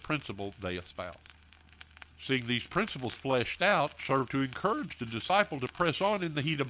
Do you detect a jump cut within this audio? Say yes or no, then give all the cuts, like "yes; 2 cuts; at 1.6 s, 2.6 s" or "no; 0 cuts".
no; 0 cuts